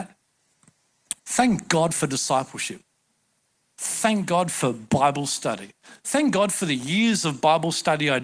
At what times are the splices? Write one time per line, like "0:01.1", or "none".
0:01.2